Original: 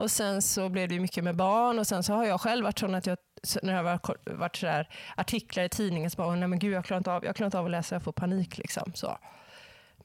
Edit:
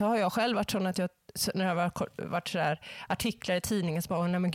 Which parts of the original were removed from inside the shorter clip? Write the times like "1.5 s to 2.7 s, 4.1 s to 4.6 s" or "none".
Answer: none